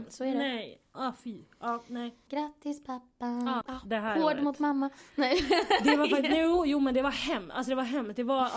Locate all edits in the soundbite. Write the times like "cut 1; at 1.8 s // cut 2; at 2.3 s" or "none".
cut 1; at 2.3 s // cut 2; at 3.6 s